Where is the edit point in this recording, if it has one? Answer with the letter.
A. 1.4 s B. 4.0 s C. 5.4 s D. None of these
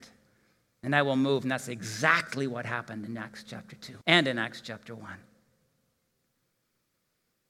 B